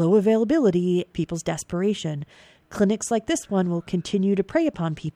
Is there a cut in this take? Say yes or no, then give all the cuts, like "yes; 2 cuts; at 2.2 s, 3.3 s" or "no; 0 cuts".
yes; 1 cut; at 1.1 s